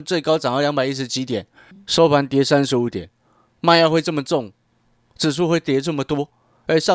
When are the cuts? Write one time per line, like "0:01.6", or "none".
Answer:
none